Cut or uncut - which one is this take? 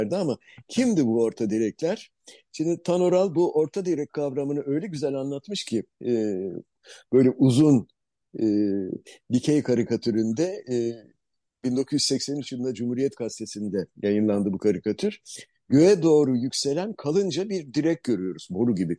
uncut